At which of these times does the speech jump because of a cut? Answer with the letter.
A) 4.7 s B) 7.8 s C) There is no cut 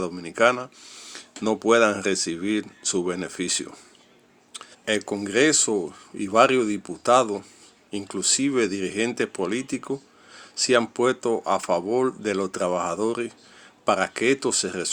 A